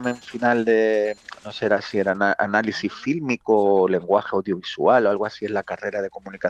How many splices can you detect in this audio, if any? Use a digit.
0